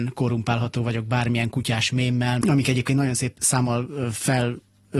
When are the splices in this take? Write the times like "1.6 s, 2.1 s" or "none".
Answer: 2.4 s